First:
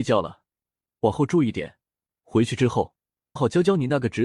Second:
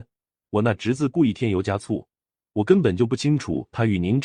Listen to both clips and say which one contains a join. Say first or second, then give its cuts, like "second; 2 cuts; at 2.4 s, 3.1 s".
first; 1 cut; at 3.4 s